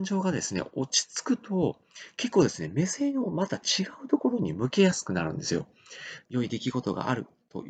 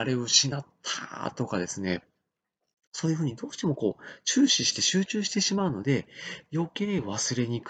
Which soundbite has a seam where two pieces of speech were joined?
first; 1 cut; at 6.3 s

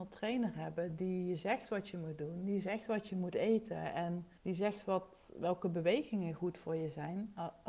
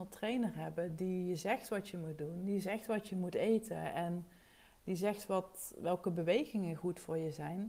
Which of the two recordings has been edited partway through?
first; 1 cut; at 4.4 s

